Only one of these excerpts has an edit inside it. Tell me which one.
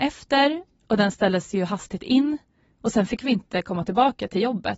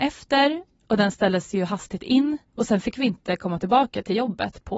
second; 1 cut; at 2.5 s

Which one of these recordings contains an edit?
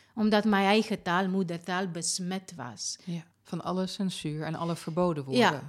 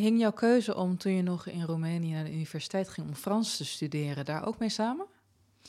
first; 1 cut; at 3.3 s

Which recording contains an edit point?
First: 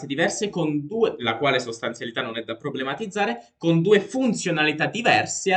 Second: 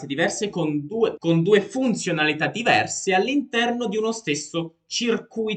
second; 1 cut; at 1.2 s

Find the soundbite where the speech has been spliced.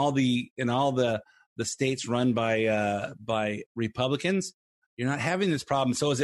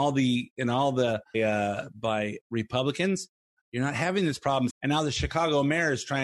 second; 2 cuts; at 1.3 s, 4.7 s

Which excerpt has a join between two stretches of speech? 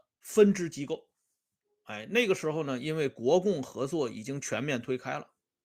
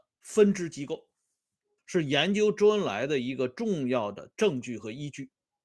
second; 1 cut; at 1.8 s

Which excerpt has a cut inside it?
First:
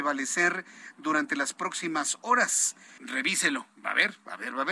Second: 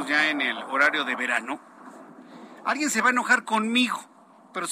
first; 1 cut; at 3.0 s

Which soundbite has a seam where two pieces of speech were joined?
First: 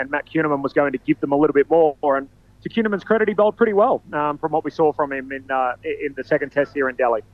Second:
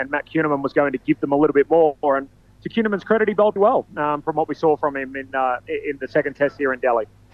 second; 1 cut; at 3.6 s

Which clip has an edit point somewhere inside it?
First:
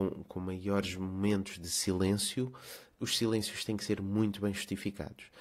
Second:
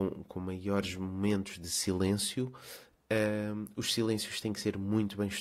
first; 1 cut; at 3.0 s

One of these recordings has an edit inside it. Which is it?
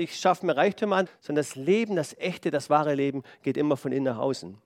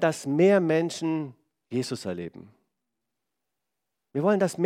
first; 1 cut; at 1.1 s

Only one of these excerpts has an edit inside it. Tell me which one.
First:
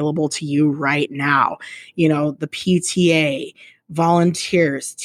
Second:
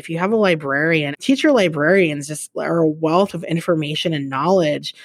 second; 1 cut; at 1.1 s

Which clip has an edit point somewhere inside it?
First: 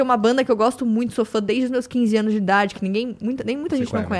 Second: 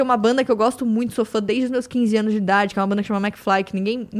first; 1 cut; at 2.7 s

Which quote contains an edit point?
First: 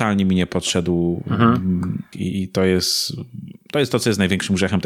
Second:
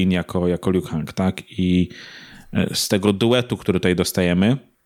first; 1 cut; at 2.1 s

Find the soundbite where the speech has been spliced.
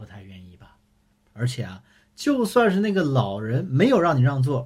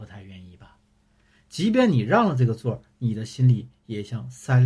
first; 1 cut; at 1.1 s

